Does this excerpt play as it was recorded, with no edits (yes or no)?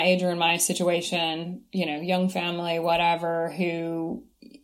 yes